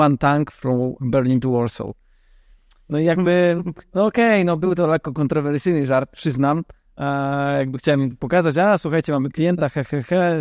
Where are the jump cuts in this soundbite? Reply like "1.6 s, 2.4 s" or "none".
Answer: none

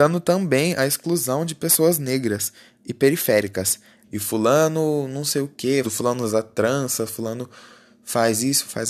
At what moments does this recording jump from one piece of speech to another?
4.0 s, 5.8 s

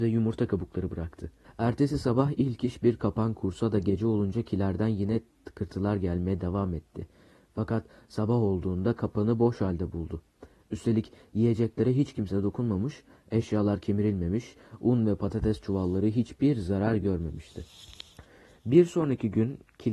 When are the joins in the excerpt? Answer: 1.4 s

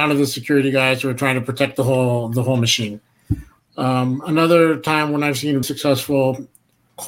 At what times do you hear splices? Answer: 3.6 s, 5.6 s

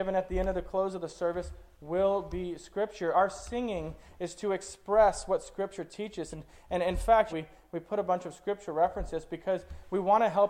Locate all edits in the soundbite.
7.3 s

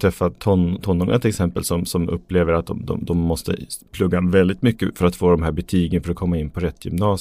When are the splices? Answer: none

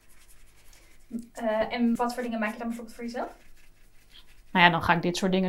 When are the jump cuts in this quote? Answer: 2.0 s

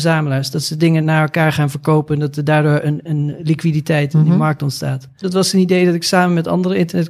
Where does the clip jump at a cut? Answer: 5.2 s

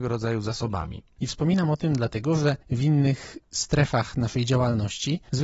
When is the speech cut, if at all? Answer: 1.1 s

